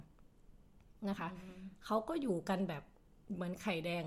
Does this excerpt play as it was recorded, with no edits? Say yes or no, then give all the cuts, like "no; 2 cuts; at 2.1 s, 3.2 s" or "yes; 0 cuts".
yes; 0 cuts